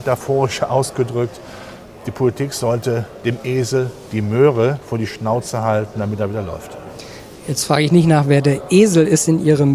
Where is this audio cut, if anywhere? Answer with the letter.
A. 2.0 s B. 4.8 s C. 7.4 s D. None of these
D